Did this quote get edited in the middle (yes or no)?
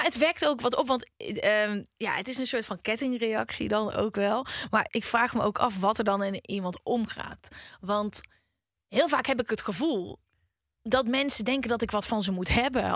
yes